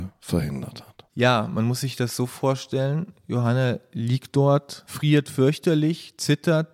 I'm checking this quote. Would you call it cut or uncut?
cut